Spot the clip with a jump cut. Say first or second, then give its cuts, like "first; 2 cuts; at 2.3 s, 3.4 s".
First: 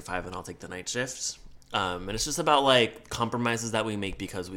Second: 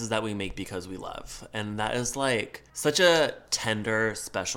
second; 1 cut; at 2.7 s